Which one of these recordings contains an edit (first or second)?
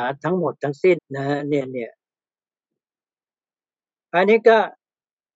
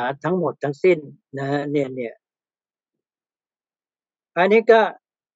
first